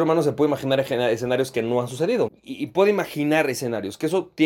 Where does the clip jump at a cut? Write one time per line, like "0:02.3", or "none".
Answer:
0:02.3